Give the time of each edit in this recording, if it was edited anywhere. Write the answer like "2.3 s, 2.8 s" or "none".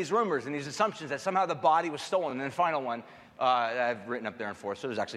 none